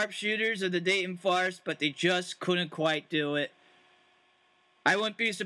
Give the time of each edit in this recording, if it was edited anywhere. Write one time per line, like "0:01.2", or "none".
none